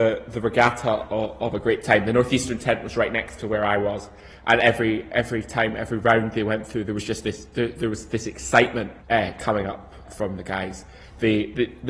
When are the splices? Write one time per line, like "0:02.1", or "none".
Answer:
0:09.0
0:10.0